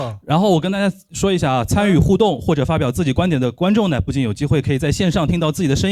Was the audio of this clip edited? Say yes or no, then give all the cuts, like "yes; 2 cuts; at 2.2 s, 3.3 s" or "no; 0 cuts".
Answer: no; 0 cuts